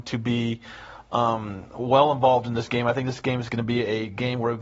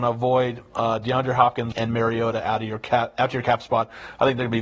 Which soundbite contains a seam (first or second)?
second